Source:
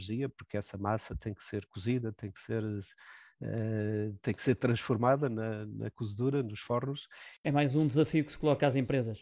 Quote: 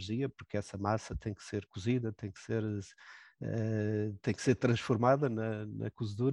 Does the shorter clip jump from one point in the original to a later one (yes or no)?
no